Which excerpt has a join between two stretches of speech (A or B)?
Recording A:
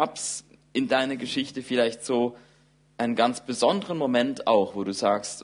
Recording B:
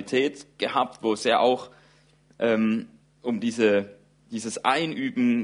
B